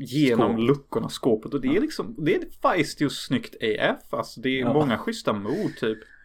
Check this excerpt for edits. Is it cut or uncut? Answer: uncut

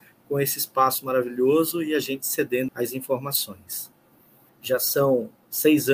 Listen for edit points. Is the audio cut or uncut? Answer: cut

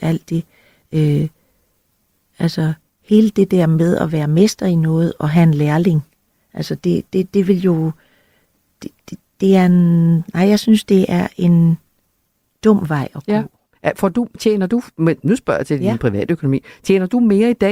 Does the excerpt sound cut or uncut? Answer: uncut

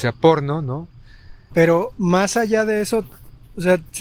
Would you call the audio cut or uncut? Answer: cut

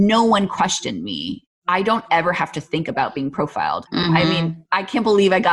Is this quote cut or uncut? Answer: uncut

